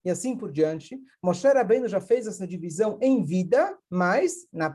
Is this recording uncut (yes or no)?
no